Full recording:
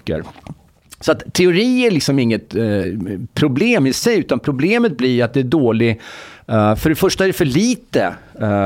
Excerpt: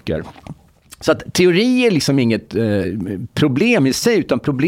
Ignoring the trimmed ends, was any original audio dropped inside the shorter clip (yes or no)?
no